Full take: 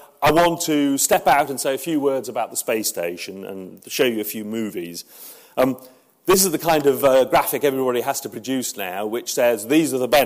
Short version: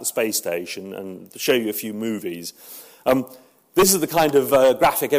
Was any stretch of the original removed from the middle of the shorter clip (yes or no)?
no